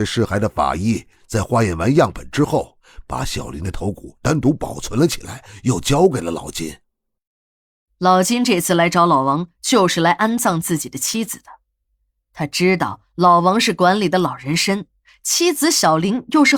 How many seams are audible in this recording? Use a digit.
0